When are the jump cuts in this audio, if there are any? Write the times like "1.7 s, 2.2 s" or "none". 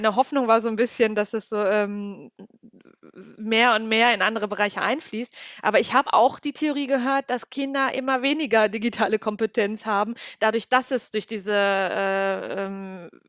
none